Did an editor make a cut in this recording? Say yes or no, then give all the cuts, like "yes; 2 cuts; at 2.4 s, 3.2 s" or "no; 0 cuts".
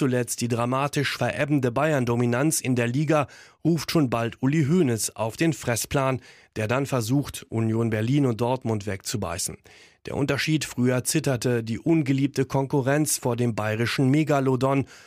no; 0 cuts